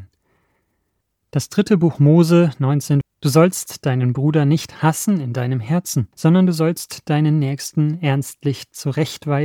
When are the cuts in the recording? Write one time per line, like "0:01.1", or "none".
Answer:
0:03.0
0:06.1